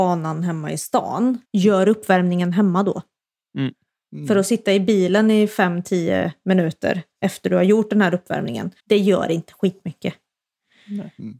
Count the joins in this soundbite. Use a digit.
2